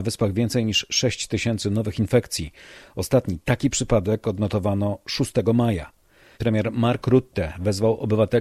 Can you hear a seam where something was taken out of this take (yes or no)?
yes